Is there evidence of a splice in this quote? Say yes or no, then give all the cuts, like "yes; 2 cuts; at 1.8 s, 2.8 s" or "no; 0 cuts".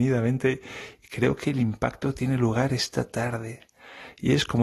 no; 0 cuts